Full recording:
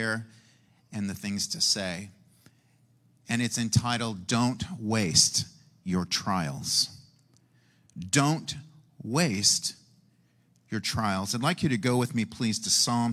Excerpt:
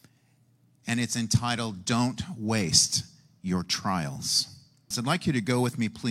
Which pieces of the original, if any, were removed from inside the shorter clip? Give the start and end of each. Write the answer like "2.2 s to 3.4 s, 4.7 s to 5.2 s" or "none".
7.3 s to 11.3 s